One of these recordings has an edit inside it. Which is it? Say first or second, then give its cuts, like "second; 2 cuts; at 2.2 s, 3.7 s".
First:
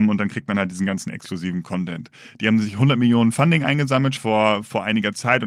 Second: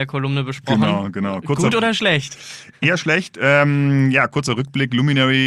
first; 1 cut; at 4.2 s